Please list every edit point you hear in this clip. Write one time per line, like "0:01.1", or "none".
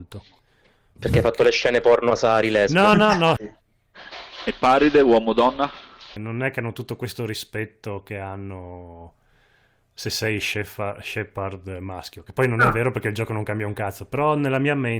0:03.4
0:06.2